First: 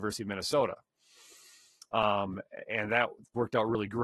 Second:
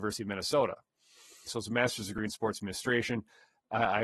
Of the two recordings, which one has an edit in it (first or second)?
second